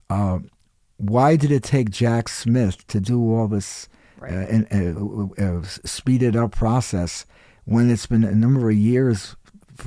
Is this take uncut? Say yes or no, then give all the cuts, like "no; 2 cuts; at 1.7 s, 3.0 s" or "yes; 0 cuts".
yes; 0 cuts